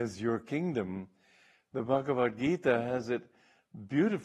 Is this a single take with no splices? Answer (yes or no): yes